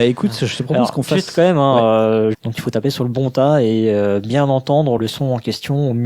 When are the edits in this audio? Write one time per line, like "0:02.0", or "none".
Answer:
0:02.3
0:05.0